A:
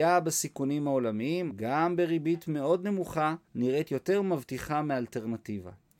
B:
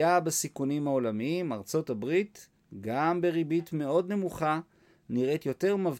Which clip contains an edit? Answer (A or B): A